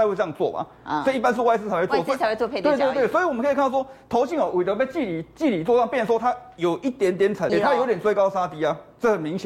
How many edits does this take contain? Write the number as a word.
one